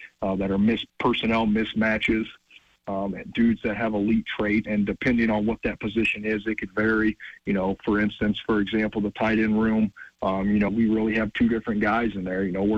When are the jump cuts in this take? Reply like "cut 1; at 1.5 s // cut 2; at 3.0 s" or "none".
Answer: cut 1; at 2.8 s // cut 2; at 4.7 s // cut 3; at 10.7 s